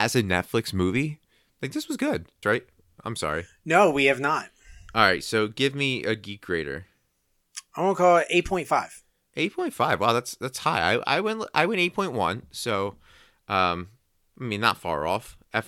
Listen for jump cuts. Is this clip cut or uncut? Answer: cut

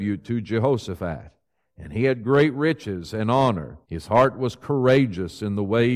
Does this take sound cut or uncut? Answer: cut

